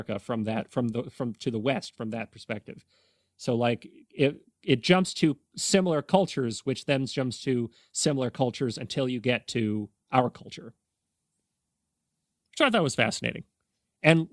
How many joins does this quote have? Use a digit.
0